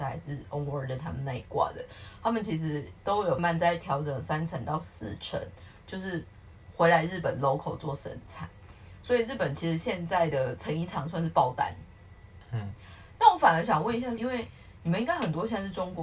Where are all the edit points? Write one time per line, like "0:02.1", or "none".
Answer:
0:03.4
0:13.2
0:14.2